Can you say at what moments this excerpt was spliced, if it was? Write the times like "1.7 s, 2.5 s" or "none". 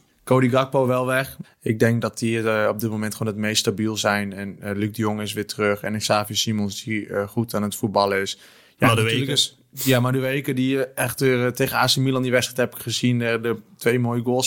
1.4 s